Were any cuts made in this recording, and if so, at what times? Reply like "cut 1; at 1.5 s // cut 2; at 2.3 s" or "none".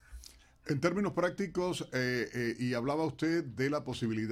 none